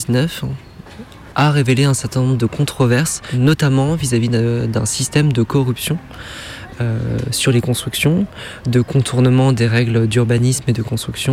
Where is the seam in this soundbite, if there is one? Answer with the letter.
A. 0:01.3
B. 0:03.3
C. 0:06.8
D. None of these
A